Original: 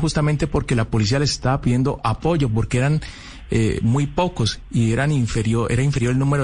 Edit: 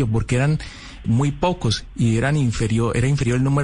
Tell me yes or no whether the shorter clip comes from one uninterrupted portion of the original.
no